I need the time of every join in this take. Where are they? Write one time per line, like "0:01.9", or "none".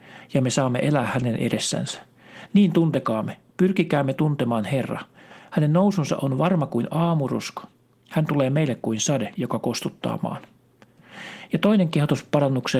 0:09.4